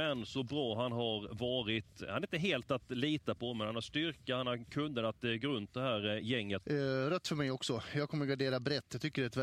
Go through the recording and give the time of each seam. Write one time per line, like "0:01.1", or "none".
0:06.6